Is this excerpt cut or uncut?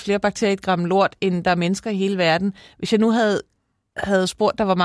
uncut